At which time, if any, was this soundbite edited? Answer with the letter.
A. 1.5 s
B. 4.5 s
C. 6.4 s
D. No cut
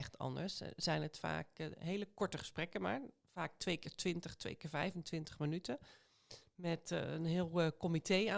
D